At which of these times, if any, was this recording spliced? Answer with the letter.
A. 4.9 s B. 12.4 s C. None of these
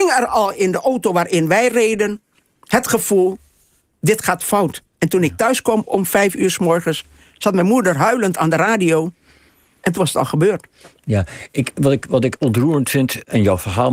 A